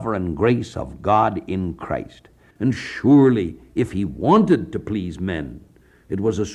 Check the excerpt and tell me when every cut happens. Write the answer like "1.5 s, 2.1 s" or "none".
2.5 s